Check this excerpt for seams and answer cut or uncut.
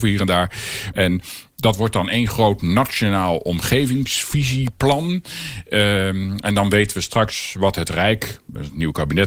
cut